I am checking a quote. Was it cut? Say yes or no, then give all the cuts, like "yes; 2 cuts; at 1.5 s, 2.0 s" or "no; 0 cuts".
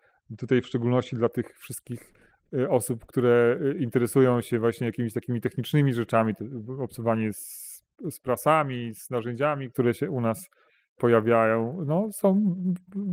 no; 0 cuts